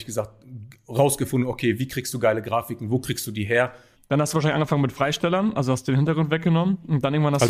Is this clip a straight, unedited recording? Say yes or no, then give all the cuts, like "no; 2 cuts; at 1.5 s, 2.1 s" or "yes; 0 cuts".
no; 1 cut; at 4.0 s